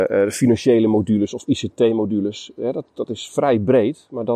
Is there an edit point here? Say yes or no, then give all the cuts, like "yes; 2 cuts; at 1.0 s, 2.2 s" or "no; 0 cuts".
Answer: no; 0 cuts